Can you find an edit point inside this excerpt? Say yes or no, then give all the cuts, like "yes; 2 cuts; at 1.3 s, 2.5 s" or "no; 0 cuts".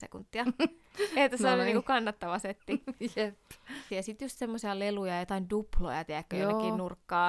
yes; 1 cut; at 3.9 s